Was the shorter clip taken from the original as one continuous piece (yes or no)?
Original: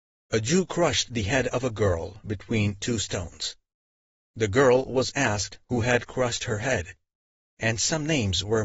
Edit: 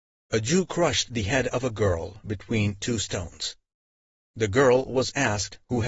yes